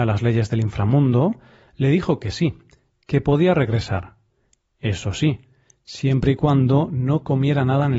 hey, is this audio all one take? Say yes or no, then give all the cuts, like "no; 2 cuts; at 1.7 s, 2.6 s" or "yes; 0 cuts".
yes; 0 cuts